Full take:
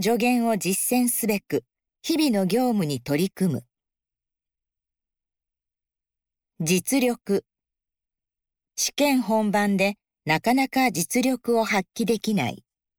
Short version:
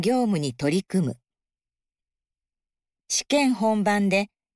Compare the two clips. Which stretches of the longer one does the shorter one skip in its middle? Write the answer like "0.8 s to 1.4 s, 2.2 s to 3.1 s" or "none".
5.4 s to 8.6 s